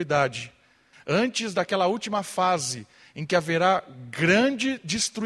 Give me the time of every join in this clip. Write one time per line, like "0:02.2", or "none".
0:00.9

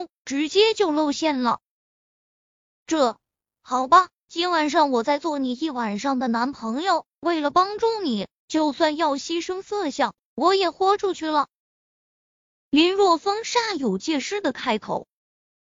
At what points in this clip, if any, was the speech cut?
none

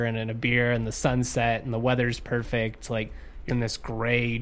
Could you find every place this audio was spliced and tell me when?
0:03.5

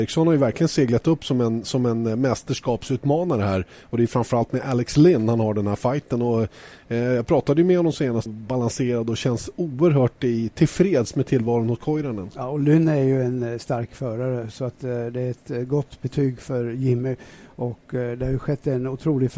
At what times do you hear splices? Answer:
0:08.3

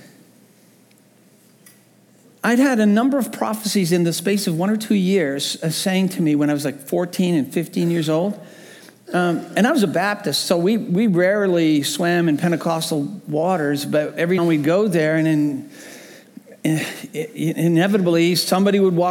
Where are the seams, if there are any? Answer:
0:14.4

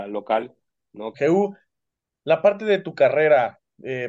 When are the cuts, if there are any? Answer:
0:01.1

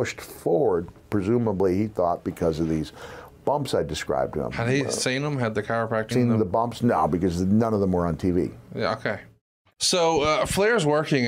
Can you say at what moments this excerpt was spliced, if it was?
0:06.1

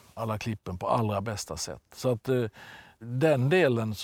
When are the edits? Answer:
none

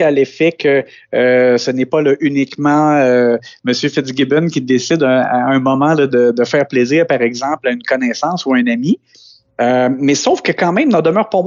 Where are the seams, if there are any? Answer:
0:06.1

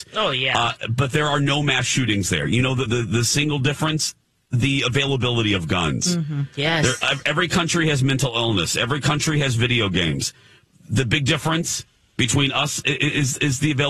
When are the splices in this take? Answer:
0:02.9

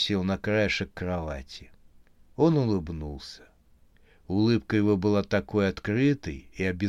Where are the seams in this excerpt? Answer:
none

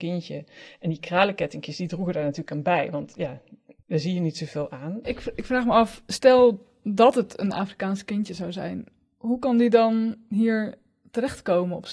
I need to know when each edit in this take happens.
0:03.8

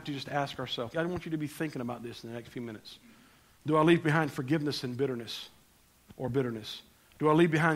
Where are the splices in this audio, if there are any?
0:00.9
0:03.6

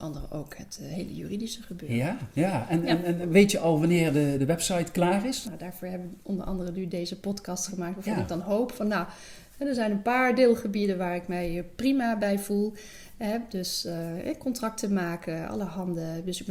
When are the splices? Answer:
0:05.4

